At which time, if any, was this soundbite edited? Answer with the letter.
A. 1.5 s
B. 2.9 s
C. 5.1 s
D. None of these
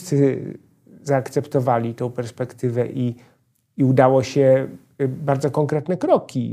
D